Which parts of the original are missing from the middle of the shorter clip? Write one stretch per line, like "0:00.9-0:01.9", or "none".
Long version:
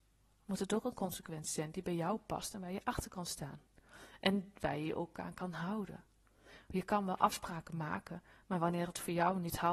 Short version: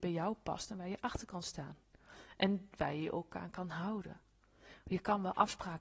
none